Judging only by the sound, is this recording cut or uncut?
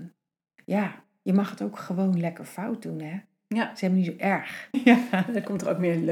cut